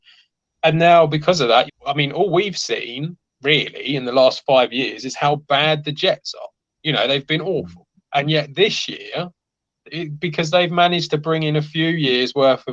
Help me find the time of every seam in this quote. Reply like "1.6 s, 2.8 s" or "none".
1.7 s